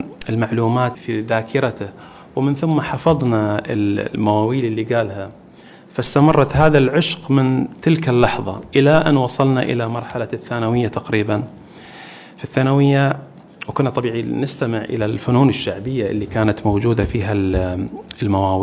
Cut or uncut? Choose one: cut